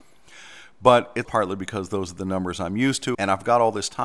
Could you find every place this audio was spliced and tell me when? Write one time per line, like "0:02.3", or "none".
0:01.2
0:03.1